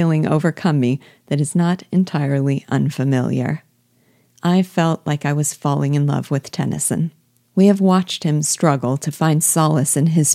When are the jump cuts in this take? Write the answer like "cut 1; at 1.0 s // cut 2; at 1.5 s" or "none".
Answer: cut 1; at 7.5 s